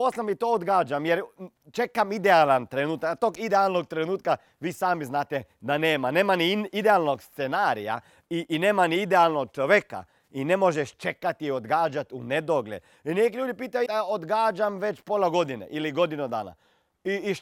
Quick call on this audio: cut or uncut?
cut